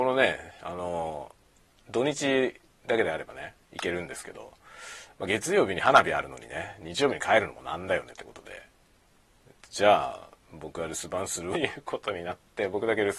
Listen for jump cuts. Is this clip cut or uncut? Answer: cut